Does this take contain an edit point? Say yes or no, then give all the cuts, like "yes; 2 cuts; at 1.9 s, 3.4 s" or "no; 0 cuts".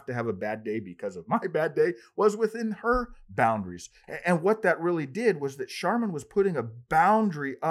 yes; 1 cut; at 4.0 s